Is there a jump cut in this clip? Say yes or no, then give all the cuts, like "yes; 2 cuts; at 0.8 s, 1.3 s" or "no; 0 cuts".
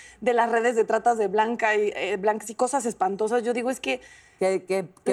no; 0 cuts